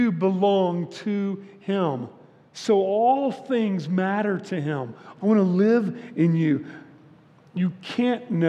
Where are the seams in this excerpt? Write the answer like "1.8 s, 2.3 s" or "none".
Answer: 5.2 s